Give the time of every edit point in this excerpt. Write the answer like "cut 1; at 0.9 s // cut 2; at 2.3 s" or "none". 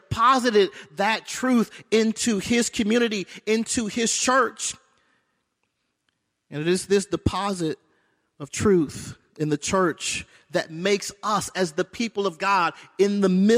none

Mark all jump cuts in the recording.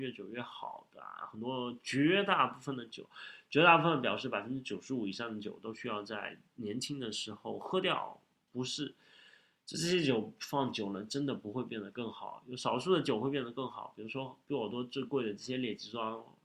none

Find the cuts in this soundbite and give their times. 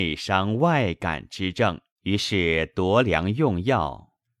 cut 1; at 1.9 s

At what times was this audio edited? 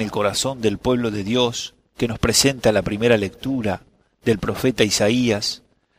none

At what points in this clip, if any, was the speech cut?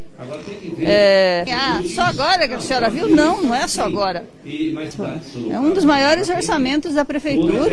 cut 1; at 1.5 s // cut 2; at 4.9 s

